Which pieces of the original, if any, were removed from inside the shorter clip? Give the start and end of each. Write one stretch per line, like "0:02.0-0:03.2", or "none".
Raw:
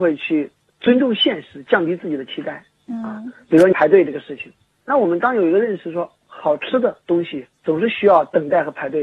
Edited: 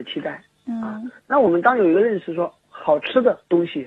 0:03.4-0:04.8